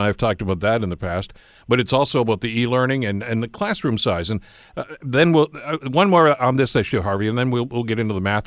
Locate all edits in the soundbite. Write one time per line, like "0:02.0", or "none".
none